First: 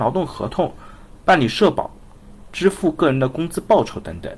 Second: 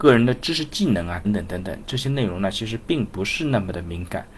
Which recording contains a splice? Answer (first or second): second